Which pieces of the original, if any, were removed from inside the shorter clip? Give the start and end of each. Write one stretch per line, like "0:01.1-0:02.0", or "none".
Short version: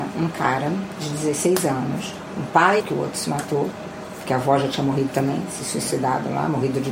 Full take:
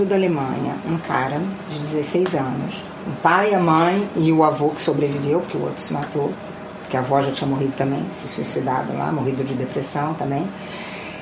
0:03.5-0:05.4